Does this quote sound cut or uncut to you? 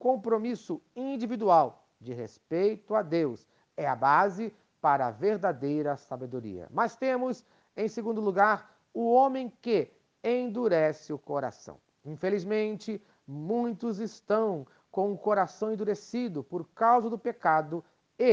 uncut